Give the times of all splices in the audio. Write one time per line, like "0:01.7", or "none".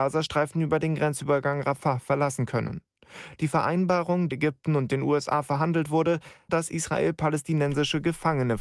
0:04.3
0:06.5